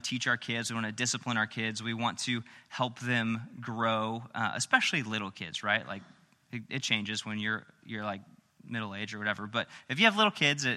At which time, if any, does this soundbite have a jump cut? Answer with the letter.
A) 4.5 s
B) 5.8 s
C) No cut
C